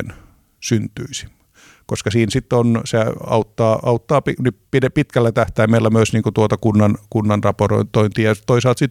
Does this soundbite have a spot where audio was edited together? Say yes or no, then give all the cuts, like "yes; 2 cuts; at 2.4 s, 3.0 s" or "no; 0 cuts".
no; 0 cuts